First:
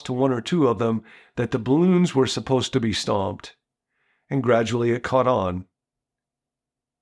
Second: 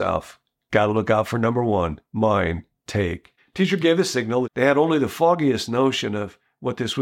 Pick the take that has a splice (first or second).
second